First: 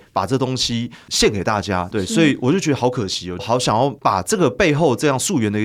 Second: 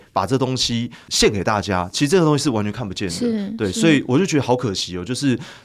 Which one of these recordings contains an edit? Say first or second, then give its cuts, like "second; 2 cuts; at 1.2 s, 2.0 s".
first; 2 cuts; at 1.9 s, 3.4 s